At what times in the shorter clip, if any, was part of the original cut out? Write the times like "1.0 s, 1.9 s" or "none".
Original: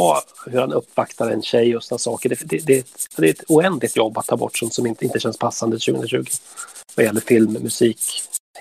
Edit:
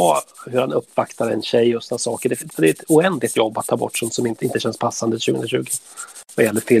2.5 s